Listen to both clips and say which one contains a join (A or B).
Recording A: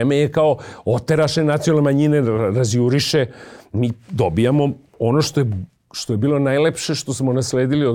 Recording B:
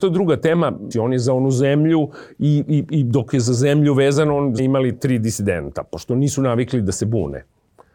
B